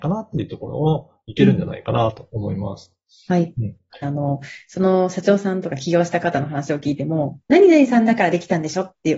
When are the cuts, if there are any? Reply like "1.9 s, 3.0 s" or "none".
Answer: 4.0 s